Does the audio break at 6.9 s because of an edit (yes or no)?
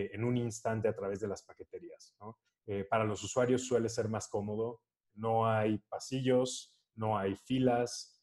no